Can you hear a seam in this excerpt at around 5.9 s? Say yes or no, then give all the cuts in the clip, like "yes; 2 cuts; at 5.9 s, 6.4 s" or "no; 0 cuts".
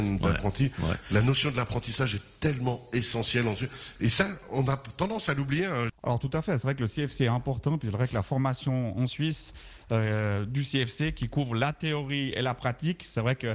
yes; 2 cuts; at 4.0 s, 5.9 s